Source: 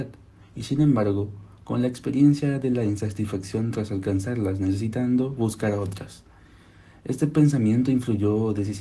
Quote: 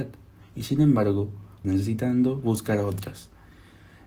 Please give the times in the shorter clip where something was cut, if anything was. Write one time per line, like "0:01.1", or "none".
0:01.6